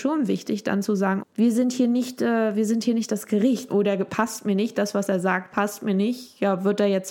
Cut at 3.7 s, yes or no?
yes